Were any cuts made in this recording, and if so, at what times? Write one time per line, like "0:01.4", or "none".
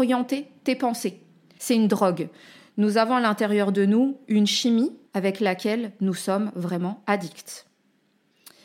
0:01.6
0:05.1